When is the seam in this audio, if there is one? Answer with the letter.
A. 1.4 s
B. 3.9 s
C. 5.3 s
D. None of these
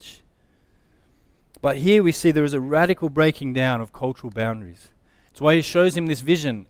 C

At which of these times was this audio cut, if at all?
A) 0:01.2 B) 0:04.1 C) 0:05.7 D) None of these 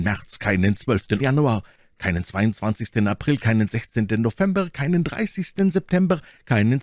A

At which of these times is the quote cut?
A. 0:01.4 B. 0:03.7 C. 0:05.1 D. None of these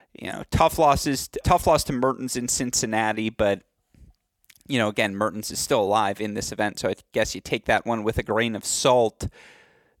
A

